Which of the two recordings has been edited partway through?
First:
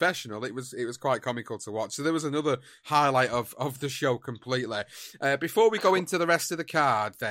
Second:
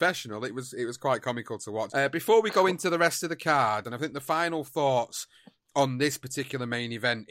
second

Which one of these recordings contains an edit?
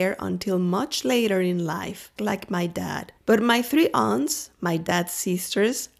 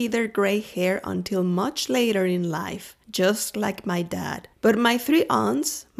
first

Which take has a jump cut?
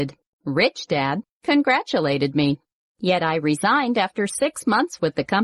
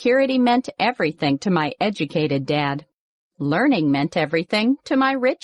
first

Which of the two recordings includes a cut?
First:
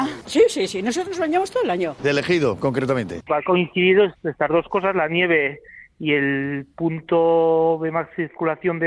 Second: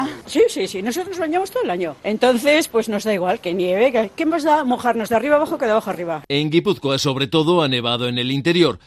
first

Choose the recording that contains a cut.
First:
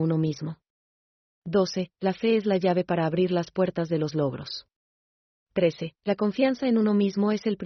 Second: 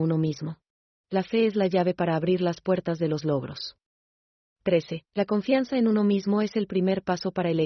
second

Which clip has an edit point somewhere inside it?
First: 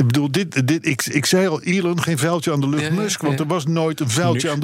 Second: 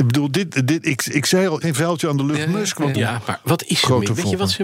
second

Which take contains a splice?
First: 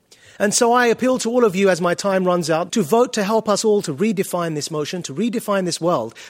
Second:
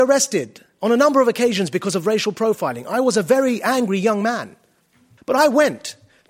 first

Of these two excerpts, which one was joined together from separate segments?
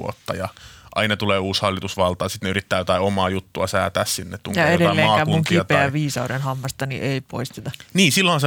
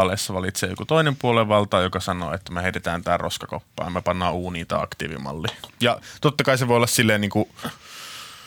second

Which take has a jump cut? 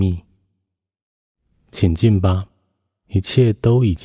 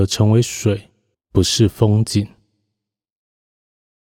second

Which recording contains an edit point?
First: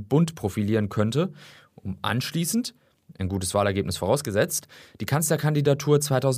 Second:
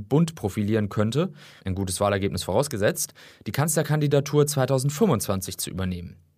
second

